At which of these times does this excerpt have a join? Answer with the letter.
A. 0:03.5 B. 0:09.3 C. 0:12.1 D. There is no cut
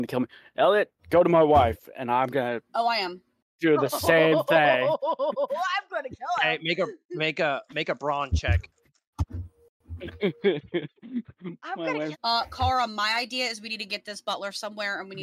C